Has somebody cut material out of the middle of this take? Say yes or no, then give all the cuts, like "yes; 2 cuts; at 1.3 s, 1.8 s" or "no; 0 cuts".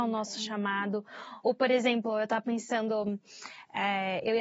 no; 0 cuts